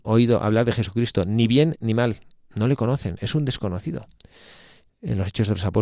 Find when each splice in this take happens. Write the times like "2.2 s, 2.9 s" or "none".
4.9 s